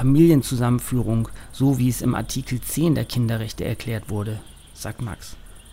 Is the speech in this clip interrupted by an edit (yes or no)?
no